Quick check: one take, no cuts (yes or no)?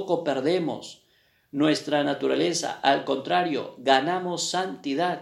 yes